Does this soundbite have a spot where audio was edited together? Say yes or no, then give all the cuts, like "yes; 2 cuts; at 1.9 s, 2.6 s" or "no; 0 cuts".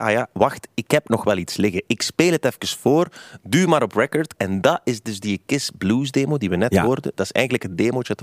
yes; 1 cut; at 4.4 s